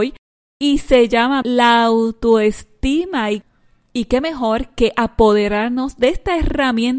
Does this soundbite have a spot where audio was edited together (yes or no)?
yes